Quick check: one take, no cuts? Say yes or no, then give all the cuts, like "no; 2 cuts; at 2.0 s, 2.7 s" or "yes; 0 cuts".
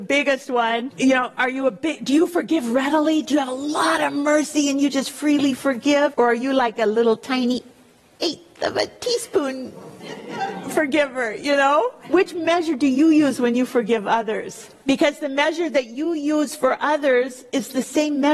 yes; 0 cuts